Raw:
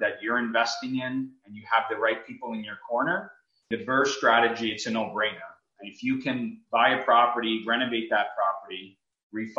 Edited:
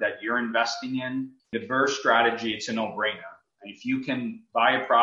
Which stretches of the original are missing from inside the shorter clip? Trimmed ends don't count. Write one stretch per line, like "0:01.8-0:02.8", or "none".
0:01.4-0:03.6